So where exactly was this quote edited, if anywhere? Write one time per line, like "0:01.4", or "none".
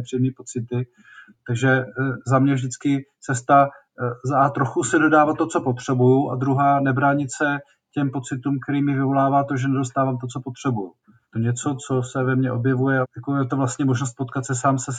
0:11.2
0:13.0